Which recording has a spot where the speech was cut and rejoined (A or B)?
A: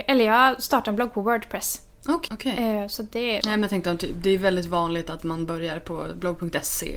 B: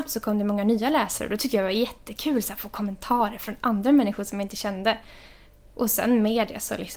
A